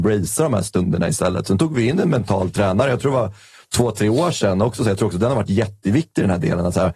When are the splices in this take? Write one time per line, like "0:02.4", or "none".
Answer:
none